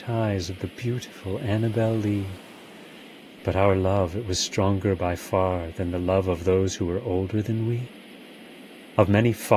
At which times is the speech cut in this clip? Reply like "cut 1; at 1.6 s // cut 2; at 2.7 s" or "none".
cut 1; at 3.4 s